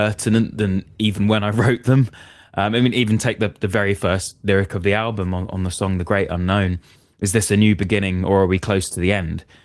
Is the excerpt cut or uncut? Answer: uncut